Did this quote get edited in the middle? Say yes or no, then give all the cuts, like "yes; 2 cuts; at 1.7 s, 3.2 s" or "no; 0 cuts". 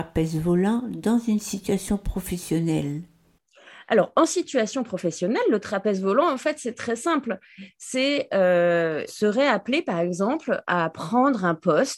yes; 1 cut; at 9.1 s